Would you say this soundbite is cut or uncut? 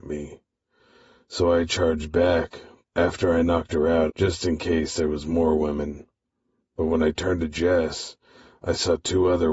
cut